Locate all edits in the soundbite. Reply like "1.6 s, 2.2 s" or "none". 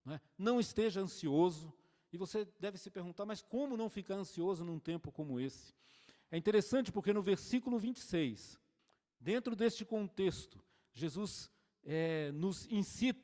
none